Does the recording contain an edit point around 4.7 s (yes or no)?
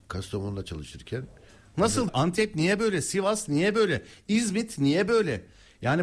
no